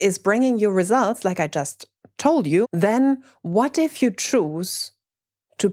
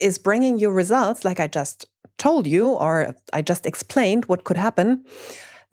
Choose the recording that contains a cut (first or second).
first